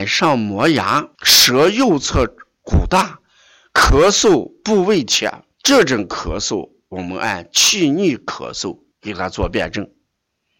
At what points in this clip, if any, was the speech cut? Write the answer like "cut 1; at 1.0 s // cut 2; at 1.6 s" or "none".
cut 1; at 1.1 s // cut 2; at 5.5 s // cut 3; at 8.9 s